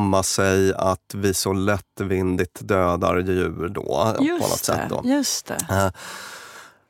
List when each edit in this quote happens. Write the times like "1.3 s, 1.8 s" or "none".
4.2 s